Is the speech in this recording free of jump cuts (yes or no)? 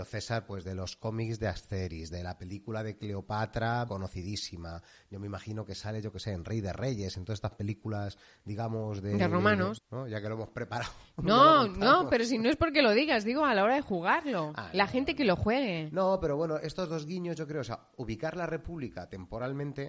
no